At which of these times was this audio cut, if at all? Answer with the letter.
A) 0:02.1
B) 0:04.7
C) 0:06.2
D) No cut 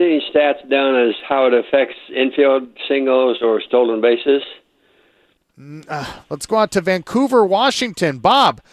C